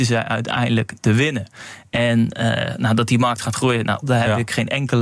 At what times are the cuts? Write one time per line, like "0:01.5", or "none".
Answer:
0:04.0